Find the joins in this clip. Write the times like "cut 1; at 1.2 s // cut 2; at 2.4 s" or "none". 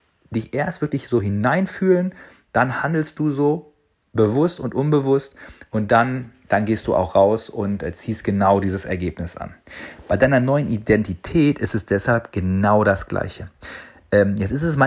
none